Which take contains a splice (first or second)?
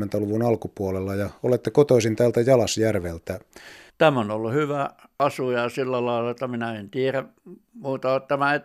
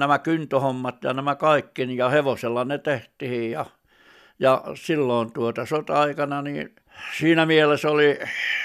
first